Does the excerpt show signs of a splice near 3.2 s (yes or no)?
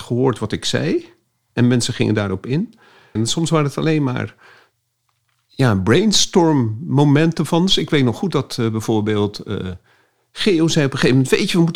yes